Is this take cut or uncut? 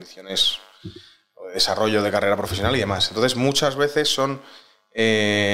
uncut